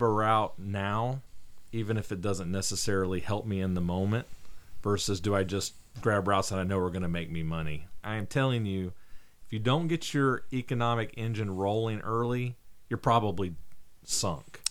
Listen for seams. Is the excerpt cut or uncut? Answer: cut